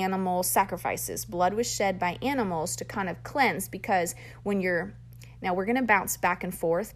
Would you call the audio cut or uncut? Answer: uncut